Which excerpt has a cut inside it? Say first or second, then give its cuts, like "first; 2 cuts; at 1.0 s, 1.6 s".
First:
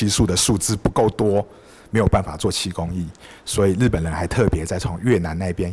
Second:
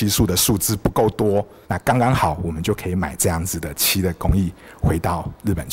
second; 1 cut; at 1.6 s